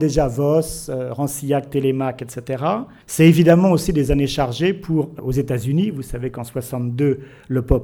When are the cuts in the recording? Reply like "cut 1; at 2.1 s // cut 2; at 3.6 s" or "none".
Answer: cut 1; at 3.0 s // cut 2; at 5.2 s